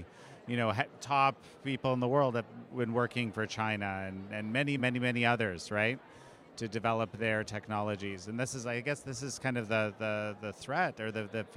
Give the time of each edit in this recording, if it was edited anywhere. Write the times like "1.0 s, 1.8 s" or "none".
4.8 s